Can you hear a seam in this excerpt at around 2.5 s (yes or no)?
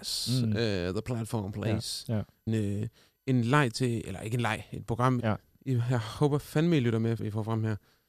yes